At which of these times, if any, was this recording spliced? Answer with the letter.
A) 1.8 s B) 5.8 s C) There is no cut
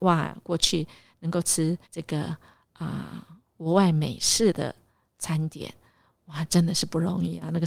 A